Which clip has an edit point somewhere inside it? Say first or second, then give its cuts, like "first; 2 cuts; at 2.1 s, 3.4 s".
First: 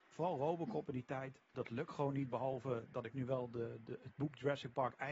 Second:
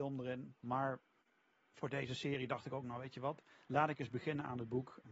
first; 1 cut; at 1.5 s